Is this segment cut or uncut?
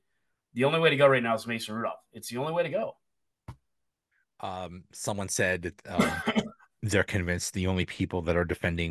uncut